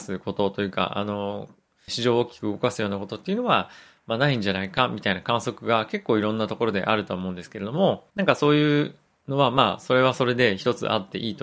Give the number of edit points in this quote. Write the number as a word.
two